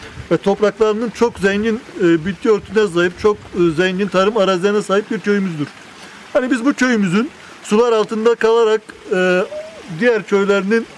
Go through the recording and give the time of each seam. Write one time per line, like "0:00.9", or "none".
0:01.1